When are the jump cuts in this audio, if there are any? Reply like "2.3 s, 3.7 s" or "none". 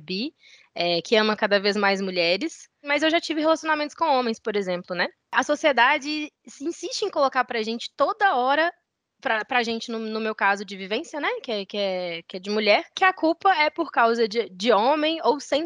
none